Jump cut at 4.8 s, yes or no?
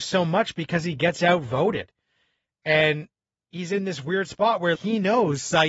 yes